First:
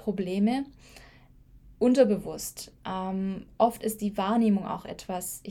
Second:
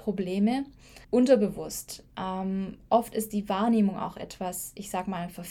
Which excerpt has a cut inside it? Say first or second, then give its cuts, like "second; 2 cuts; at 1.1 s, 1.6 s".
second; 1 cut; at 1.0 s